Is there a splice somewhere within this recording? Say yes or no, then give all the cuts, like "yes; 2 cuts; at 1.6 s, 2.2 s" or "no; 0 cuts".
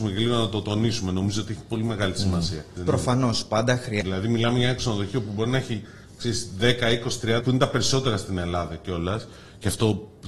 yes; 3 cuts; at 2.8 s, 4.0 s, 7.4 s